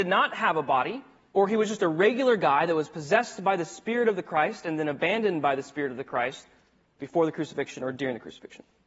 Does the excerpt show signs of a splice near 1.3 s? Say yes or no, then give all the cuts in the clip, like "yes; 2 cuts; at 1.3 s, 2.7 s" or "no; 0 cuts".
yes; 1 cut; at 1.3 s